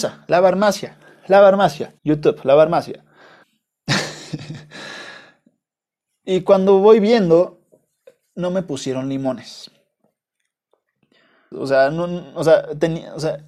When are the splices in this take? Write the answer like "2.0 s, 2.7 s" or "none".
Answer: 2.0 s, 3.4 s, 11.5 s